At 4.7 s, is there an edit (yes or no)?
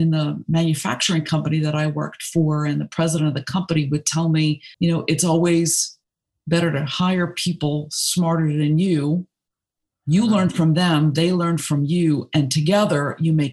yes